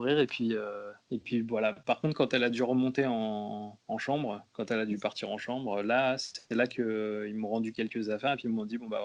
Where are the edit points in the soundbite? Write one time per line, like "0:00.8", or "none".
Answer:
none